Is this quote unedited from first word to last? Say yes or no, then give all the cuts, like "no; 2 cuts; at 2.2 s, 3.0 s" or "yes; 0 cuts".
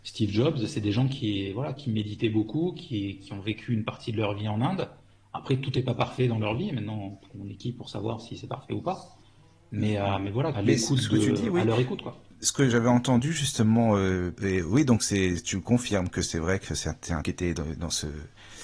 no; 3 cuts; at 10.5 s, 14.4 s, 17.2 s